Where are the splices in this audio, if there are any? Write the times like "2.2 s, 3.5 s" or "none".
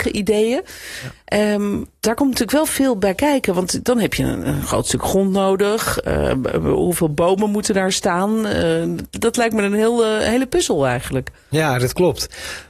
none